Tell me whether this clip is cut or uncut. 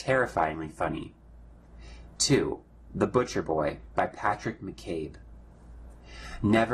uncut